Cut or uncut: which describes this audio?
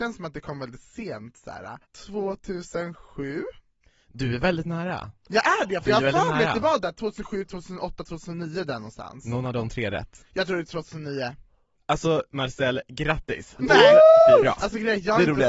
cut